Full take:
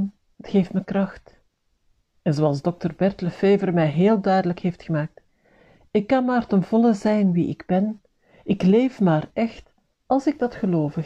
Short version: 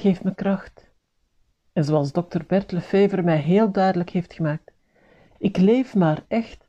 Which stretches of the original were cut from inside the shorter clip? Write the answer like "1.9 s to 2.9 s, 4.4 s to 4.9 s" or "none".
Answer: 5.8 s to 8.4 s